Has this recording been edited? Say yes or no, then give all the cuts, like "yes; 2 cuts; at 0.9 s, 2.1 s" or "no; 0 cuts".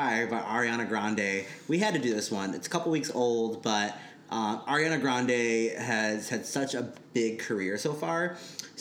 no; 0 cuts